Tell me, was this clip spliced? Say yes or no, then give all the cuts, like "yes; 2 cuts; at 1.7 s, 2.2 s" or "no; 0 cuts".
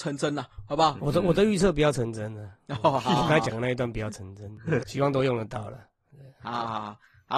yes; 2 cuts; at 1.0 s, 4.8 s